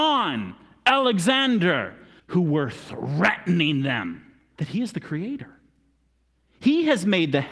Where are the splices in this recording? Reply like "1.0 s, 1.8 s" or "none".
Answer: 2.2 s, 4.6 s

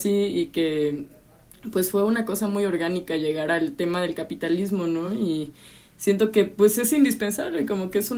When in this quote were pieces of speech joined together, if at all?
none

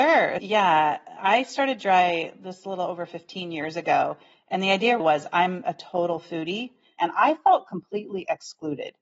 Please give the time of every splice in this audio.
5.0 s, 7.0 s

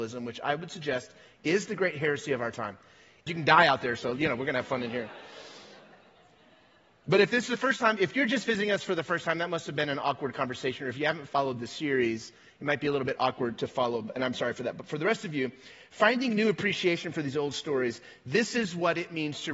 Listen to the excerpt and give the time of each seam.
3.3 s

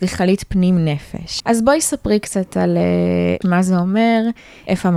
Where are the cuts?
1.4 s, 3.4 s

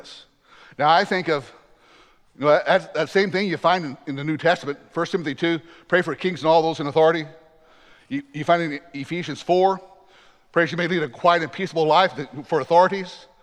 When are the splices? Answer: none

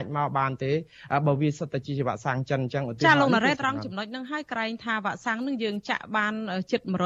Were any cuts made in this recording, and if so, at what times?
3.5 s

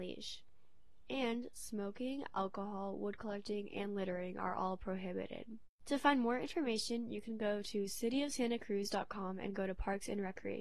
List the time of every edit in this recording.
none

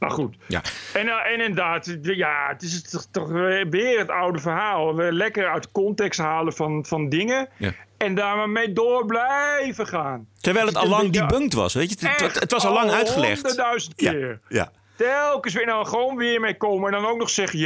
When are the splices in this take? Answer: none

